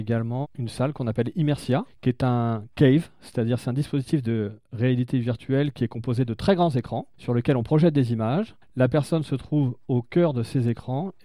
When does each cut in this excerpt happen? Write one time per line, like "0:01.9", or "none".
none